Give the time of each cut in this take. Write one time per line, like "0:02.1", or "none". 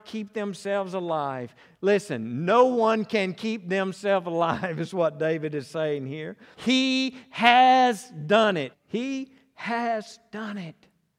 0:06.5
0:08.7